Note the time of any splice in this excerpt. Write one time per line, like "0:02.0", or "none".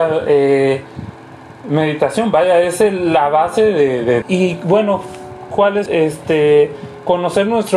0:04.2
0:05.9